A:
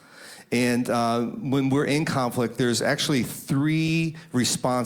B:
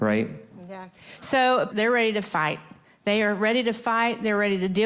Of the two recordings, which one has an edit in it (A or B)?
B